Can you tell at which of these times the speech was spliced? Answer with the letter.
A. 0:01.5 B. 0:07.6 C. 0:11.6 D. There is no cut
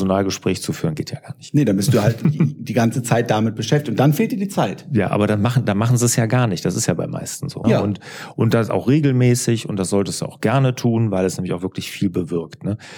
B